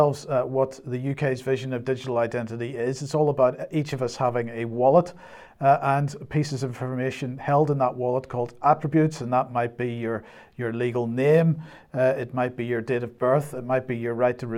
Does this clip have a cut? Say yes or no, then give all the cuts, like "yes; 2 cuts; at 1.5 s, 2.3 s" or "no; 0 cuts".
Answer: no; 0 cuts